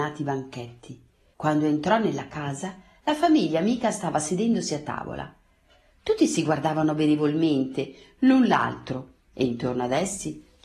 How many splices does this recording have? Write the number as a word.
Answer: one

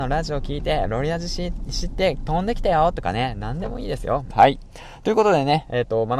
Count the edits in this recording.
one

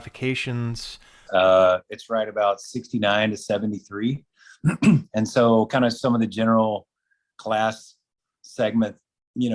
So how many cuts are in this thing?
one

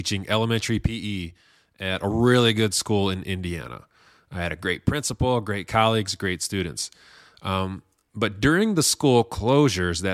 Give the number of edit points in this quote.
zero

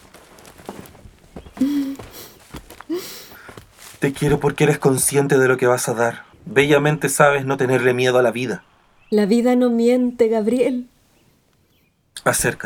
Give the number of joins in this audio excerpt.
one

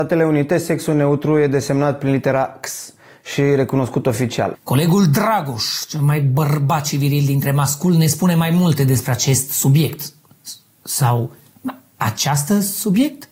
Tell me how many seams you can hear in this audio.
one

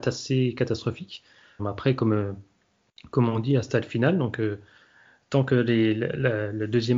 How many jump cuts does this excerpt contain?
one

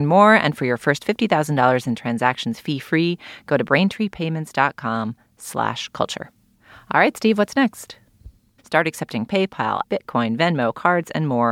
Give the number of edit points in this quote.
two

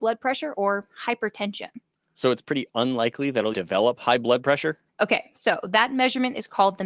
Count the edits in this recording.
two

